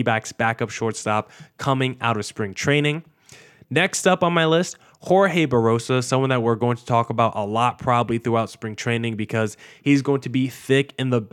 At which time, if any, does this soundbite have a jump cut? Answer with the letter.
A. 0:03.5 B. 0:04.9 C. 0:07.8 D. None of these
D